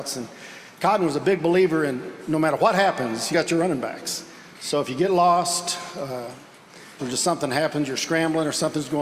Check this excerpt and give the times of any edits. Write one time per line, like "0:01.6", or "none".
0:03.3
0:07.0